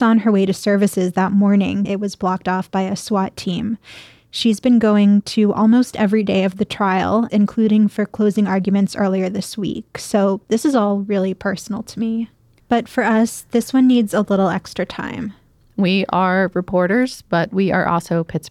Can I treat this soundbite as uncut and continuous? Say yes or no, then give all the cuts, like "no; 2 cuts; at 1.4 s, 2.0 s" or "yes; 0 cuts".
no; 3 cuts; at 1.8 s, 7.3 s, 12.6 s